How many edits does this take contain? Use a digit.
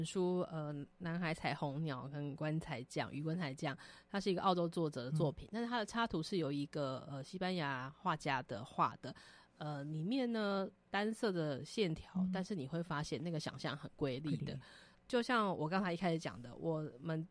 1